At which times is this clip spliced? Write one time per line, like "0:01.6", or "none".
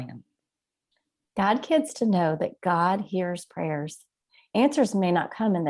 none

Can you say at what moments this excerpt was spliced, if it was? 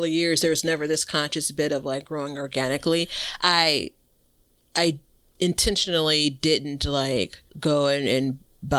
0:07.5

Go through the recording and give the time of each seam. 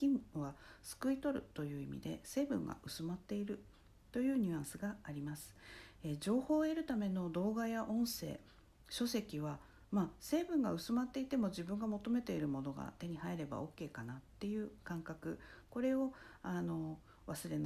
none

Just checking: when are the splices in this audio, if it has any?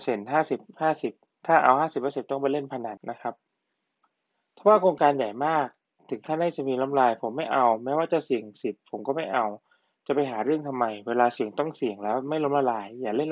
0:03.0

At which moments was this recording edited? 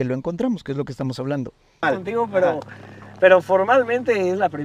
0:01.8

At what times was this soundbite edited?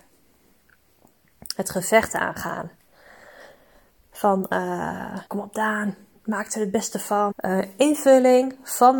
0:05.3
0:07.3

